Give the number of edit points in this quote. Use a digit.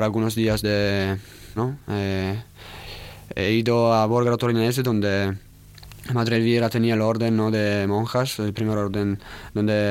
1